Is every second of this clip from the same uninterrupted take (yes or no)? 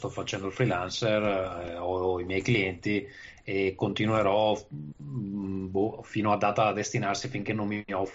yes